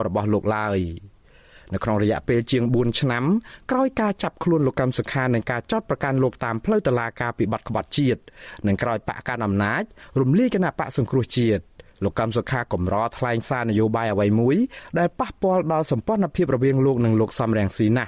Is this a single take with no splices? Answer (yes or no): yes